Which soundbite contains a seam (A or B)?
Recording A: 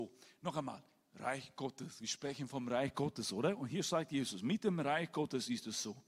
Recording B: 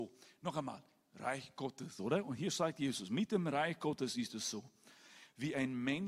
B